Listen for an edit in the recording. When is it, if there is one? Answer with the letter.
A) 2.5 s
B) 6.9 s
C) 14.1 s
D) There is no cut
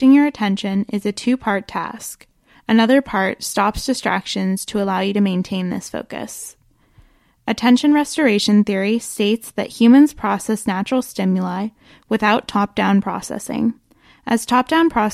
A